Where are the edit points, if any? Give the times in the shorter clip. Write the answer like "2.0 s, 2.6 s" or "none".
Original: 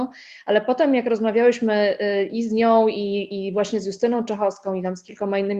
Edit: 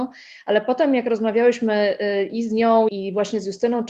2.9 s